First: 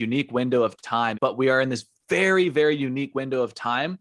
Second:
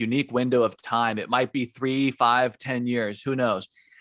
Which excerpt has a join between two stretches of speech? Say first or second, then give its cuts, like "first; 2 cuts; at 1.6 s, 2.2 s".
first; 1 cut; at 1.1 s